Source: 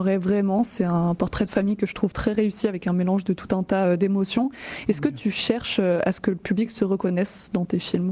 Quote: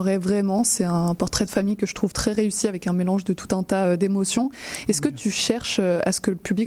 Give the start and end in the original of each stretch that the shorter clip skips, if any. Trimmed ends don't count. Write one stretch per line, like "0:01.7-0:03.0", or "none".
none